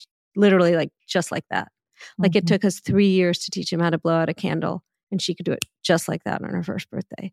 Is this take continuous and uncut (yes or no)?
yes